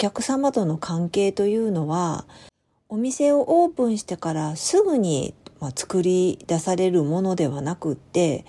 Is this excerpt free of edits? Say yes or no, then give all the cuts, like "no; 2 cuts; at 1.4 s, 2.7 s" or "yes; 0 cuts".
yes; 0 cuts